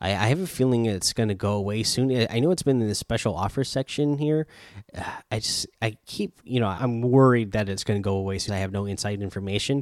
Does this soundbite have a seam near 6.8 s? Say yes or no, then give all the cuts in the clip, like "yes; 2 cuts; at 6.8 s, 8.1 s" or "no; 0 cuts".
yes; 2 cuts; at 6.8 s, 8.5 s